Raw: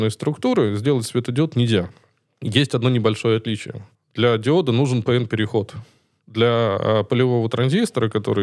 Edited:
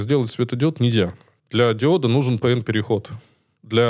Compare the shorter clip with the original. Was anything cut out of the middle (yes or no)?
yes